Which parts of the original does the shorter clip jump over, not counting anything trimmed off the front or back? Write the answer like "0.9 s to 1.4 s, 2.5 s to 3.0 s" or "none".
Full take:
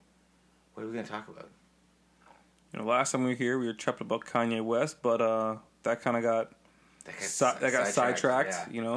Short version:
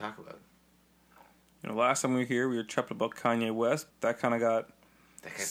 5.0 s to 5.7 s